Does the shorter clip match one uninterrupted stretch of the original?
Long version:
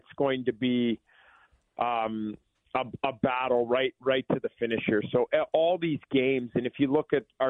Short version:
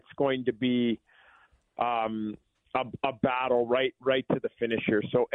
yes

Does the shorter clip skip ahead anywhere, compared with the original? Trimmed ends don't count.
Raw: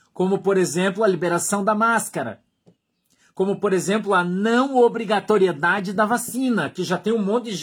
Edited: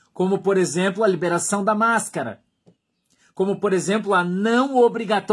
no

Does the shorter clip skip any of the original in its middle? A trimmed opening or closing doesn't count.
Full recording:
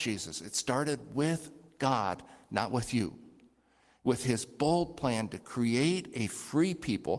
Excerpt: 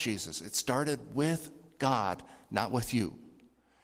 no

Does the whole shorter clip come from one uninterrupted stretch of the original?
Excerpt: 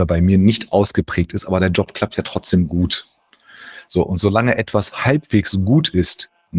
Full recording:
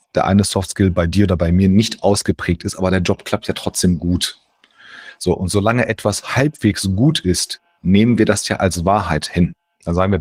yes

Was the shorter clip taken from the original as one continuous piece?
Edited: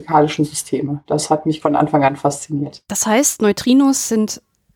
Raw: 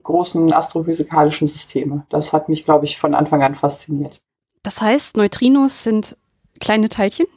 no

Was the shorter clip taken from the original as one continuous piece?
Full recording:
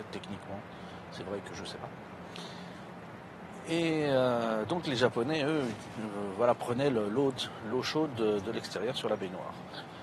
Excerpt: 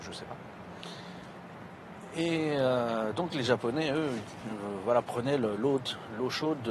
yes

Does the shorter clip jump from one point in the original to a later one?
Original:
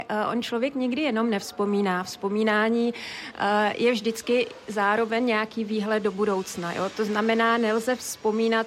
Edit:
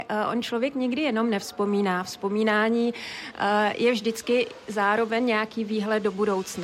no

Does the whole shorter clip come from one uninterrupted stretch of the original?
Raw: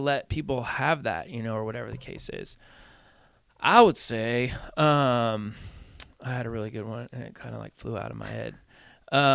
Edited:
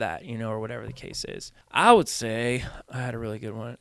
no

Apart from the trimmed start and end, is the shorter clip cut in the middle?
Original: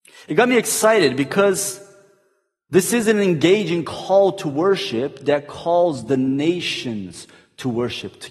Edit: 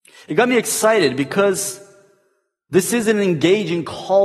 no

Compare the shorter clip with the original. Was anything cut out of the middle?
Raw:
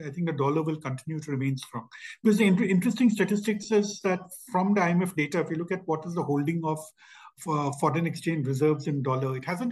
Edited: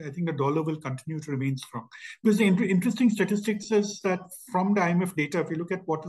no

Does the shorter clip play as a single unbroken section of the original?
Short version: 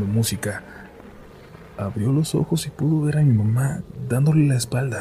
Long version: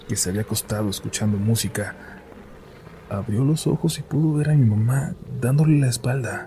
yes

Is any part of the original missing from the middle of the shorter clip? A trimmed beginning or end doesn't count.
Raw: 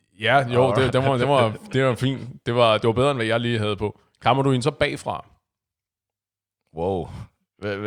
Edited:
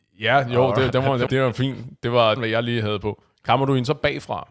yes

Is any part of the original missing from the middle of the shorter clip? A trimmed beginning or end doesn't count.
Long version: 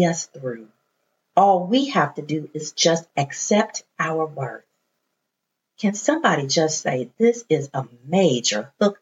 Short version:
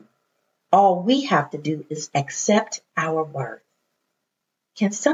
yes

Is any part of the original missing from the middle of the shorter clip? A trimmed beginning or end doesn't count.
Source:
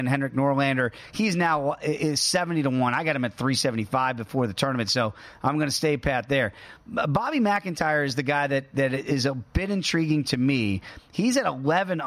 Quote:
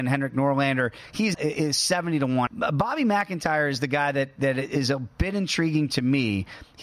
yes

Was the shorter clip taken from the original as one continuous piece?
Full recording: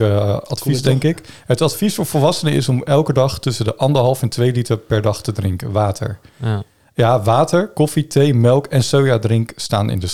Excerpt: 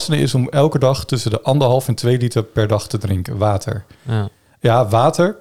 yes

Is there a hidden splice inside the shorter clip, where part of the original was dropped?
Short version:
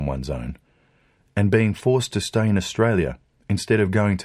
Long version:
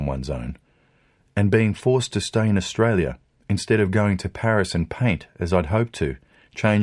no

